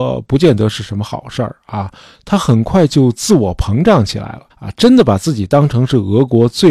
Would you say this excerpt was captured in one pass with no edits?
no; 1 cut; at 4.5 s

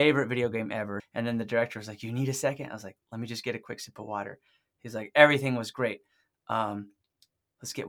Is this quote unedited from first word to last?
no; 1 cut; at 1.0 s

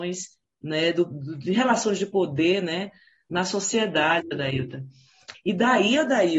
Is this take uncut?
no; 1 cut; at 5.3 s

